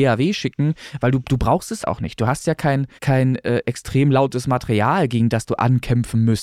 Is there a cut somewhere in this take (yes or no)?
yes